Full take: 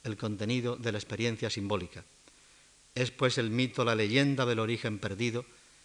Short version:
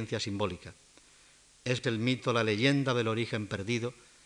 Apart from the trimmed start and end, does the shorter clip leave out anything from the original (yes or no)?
yes